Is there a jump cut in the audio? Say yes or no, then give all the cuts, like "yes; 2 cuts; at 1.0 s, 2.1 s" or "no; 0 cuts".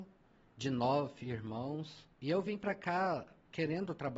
yes; 1 cut; at 2.1 s